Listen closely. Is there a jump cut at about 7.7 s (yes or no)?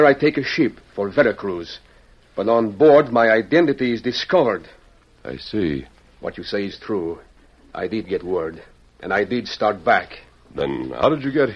no